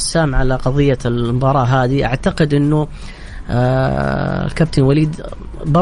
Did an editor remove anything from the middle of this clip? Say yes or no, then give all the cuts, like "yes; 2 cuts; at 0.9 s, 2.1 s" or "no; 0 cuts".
no; 0 cuts